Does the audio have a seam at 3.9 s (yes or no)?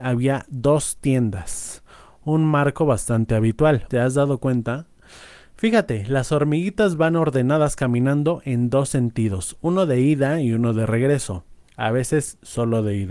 yes